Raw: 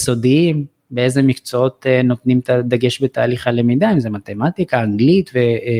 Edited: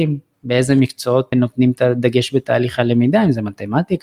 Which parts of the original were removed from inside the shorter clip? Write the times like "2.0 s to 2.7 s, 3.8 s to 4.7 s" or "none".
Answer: 1.8 s to 2.0 s